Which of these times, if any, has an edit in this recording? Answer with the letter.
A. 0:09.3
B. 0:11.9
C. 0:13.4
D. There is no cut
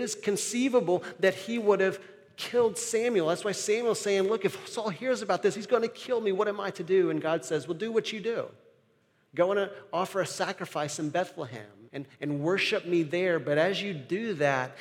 B